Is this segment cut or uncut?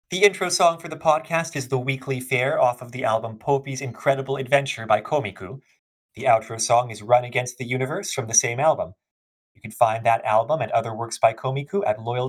uncut